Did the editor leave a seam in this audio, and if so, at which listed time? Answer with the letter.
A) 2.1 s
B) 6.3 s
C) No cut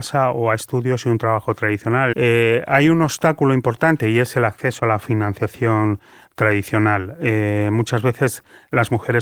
A